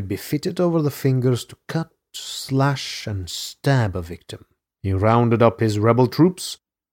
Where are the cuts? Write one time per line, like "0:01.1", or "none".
0:04.7